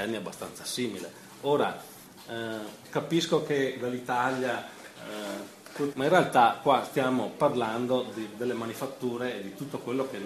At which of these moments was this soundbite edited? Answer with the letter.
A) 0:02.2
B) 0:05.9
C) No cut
B